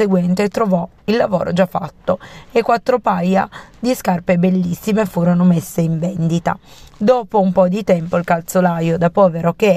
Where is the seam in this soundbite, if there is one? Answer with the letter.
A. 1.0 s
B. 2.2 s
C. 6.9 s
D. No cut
A